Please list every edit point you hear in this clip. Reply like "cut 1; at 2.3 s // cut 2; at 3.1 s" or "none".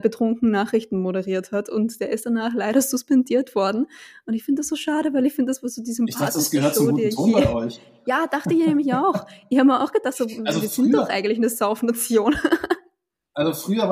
none

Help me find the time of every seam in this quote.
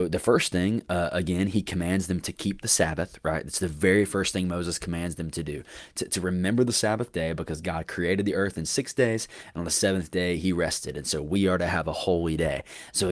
none

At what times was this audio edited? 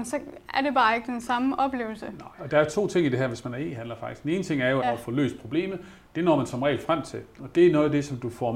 cut 1; at 4.8 s // cut 2; at 7.4 s

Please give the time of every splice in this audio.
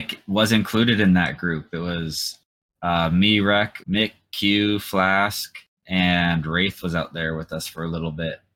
cut 1; at 3.8 s

